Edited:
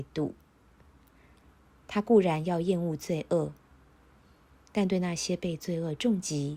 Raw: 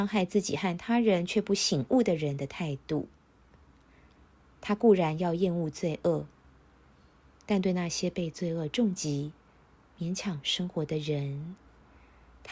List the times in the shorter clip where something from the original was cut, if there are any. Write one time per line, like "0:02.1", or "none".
none